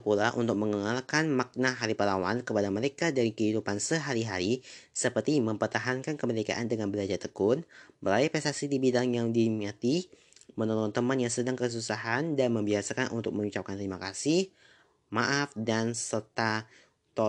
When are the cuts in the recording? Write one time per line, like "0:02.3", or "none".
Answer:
none